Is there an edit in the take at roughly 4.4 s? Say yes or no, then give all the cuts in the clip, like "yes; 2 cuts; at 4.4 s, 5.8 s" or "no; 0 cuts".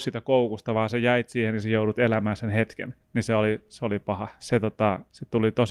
no; 1 cut; at 3.0 s